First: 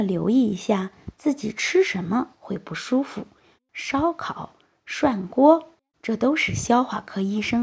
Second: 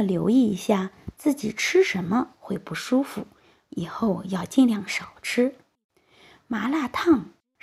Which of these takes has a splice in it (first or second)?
first